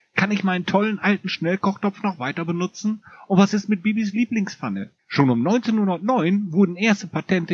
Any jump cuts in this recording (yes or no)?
yes